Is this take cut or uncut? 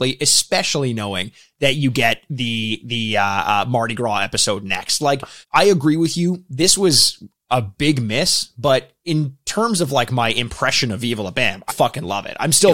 cut